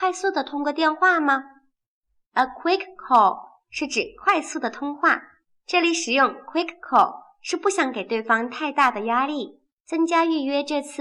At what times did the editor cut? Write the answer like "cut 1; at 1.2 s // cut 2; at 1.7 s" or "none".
none